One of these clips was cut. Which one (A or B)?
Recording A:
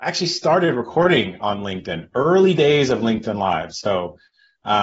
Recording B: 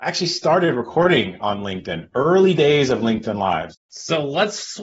B